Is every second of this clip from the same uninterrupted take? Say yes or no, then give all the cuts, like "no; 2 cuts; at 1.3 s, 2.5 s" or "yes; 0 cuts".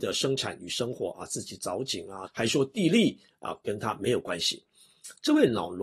no; 1 cut; at 2.3 s